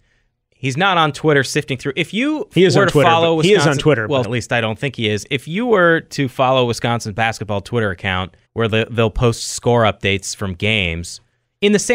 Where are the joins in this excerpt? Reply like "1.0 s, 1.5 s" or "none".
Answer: 4.2 s, 8.5 s

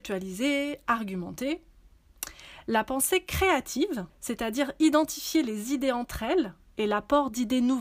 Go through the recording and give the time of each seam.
4.1 s

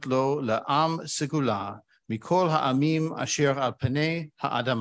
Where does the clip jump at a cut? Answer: none

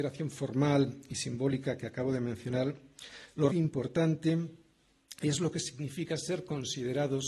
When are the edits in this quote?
3.5 s

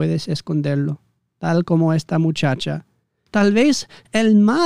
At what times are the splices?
3.3 s

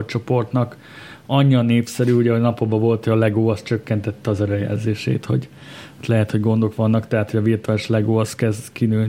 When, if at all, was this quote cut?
none

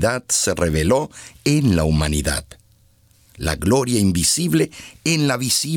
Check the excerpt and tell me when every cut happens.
none

